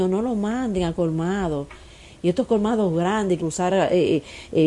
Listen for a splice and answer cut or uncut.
cut